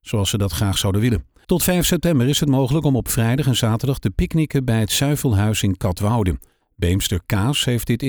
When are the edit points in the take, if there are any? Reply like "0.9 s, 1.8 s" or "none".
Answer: 1.4 s